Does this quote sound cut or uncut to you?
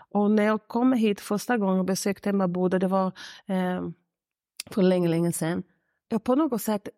uncut